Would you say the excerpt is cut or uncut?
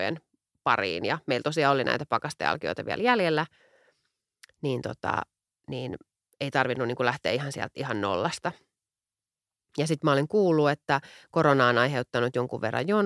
uncut